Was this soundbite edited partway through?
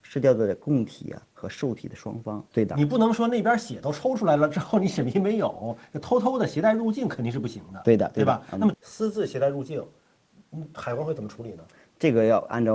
yes; 2 cuts; at 2.5 s, 8.7 s

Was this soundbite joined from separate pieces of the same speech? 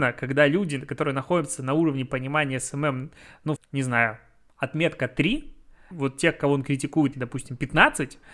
yes; 3 cuts; at 3.6 s, 5.9 s, 7.1 s

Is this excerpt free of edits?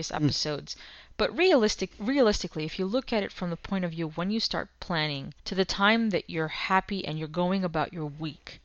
no; 2 cuts; at 1.9 s, 5.4 s

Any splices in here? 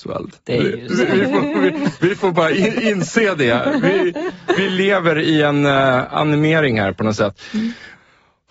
no; 0 cuts

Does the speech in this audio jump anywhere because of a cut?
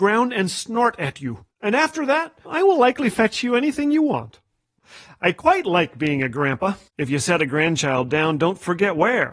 yes; 2 cuts; at 2.4 s, 6.9 s

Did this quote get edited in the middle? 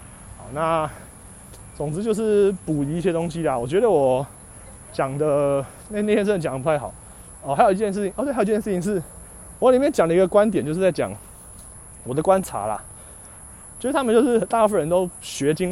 yes; 1 cut; at 13.8 s

